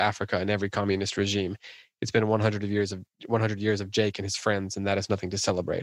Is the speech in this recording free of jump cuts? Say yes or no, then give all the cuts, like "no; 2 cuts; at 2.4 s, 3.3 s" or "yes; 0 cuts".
yes; 0 cuts